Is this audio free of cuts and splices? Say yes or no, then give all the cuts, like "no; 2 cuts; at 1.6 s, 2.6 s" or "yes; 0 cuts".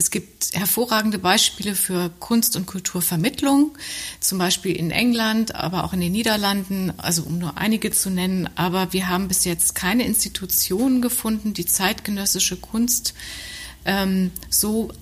yes; 0 cuts